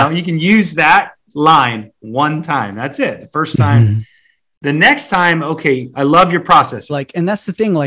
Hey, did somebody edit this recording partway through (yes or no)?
yes